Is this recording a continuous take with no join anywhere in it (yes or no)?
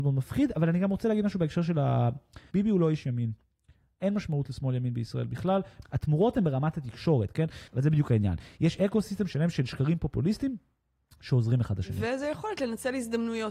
no